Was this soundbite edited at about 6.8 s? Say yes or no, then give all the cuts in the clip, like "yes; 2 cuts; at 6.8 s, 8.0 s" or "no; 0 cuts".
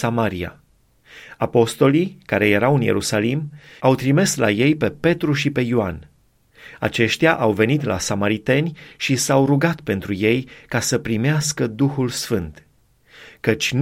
no; 1 cut; at 3.8 s